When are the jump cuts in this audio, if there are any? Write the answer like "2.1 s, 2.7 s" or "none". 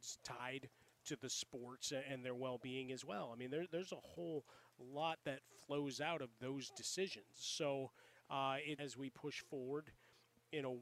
8.8 s